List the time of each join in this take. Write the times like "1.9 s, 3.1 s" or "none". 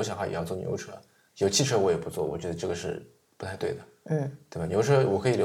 none